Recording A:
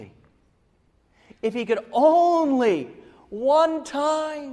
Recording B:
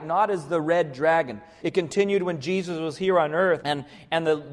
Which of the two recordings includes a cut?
B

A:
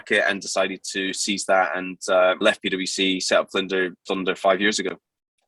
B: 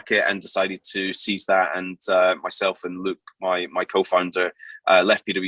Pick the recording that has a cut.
A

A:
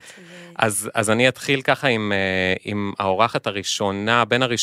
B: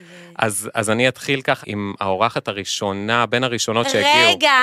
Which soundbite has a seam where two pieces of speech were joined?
B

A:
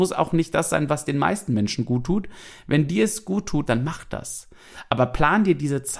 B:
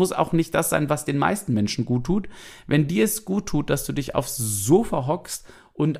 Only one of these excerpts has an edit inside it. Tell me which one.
A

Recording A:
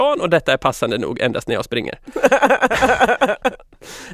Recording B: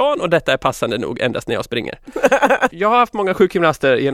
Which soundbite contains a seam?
B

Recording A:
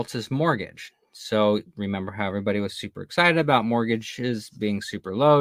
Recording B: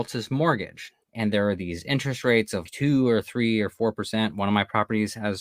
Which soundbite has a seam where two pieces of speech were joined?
B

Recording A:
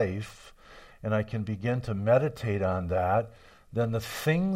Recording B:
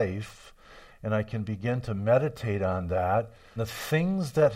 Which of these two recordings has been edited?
B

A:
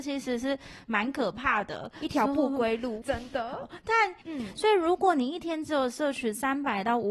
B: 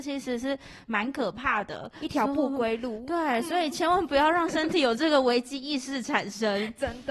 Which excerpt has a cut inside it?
A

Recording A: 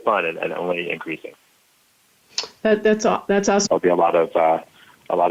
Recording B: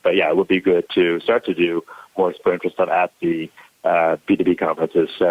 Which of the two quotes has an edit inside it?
A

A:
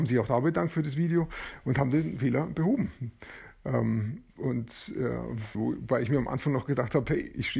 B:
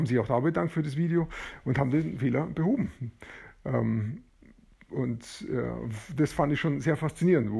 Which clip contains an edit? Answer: A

